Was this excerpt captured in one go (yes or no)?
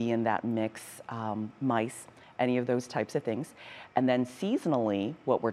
yes